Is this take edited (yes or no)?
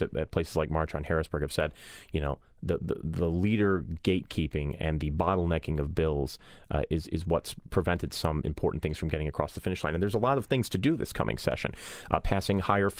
no